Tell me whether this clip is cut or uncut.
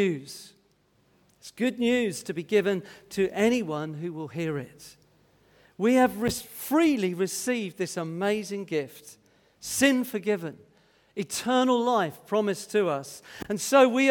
uncut